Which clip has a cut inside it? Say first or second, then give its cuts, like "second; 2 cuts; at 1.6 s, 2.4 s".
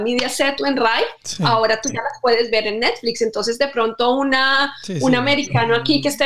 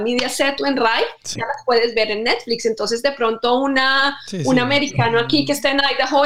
second; 1 cut; at 1.4 s